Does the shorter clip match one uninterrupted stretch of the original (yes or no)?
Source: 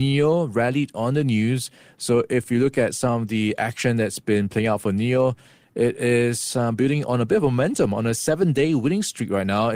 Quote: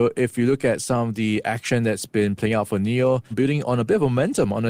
no